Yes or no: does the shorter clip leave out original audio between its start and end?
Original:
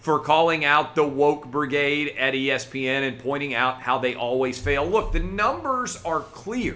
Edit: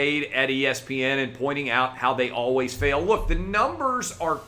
no